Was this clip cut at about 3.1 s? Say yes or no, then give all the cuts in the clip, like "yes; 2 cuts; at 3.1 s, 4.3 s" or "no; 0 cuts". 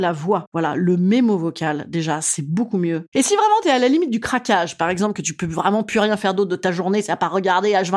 yes; 1 cut; at 3.1 s